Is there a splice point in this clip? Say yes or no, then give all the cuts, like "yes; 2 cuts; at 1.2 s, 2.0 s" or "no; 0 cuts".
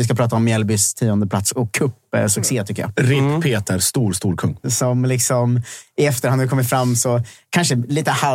yes; 1 cut; at 4.6 s